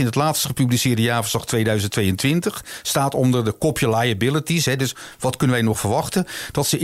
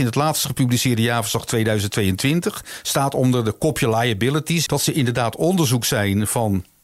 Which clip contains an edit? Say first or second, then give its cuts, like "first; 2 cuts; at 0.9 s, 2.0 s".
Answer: second; 1 cut; at 4.7 s